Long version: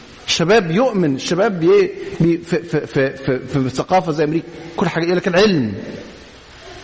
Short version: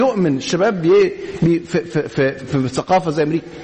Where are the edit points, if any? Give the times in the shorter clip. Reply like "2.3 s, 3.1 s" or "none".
2.4 s